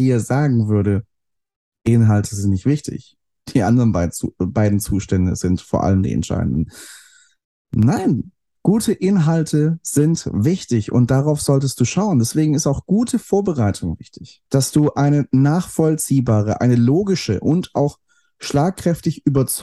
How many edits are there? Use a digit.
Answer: 1